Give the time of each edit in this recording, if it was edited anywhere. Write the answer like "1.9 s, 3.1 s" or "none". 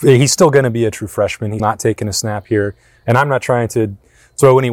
1.6 s